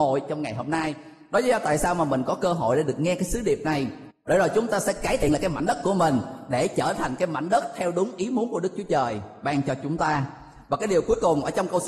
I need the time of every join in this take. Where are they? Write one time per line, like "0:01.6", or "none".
none